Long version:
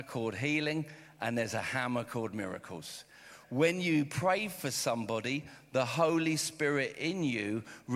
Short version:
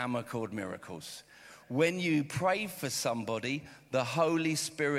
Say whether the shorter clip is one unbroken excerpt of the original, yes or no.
yes